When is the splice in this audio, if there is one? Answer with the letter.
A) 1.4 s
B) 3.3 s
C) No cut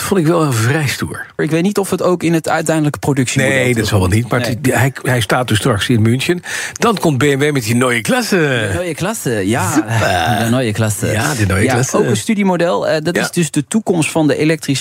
A